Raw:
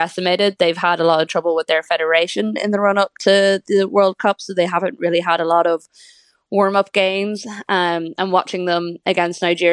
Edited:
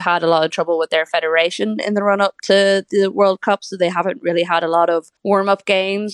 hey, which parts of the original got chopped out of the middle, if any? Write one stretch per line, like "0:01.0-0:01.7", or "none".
0:05.9-0:06.4